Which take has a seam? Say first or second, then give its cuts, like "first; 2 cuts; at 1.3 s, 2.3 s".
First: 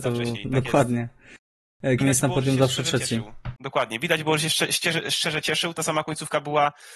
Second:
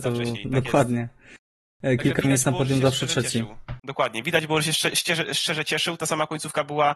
first; 1 cut; at 2.0 s